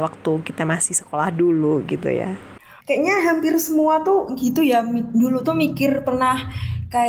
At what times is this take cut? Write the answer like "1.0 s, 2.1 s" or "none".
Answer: 2.8 s